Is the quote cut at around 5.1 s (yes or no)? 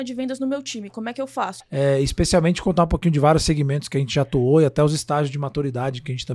no